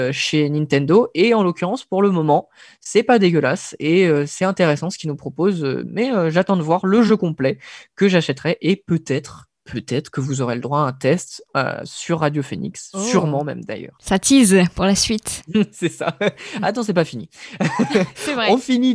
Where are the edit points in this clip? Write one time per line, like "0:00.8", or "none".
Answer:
none